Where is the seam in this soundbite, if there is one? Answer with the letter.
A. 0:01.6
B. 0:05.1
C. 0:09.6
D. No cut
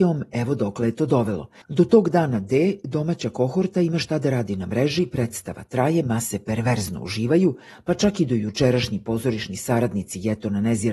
A